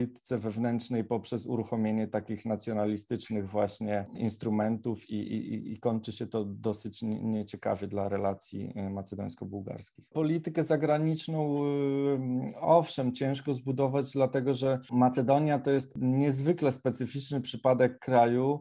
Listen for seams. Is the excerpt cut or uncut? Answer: cut